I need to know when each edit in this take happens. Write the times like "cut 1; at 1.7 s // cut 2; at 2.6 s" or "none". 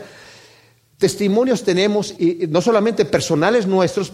cut 1; at 2.2 s